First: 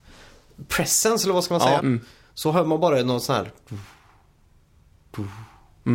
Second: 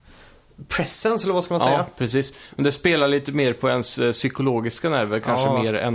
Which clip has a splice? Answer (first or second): first